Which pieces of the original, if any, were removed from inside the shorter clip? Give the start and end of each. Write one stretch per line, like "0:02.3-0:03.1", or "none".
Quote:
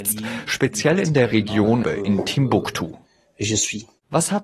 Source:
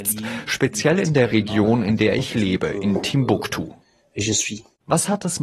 0:01.8-0:02.6